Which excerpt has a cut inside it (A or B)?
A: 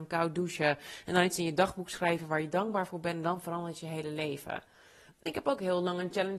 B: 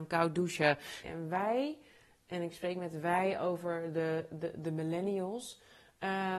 B